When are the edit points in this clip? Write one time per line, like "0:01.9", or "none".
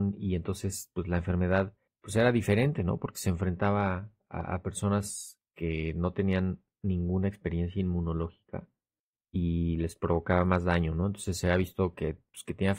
none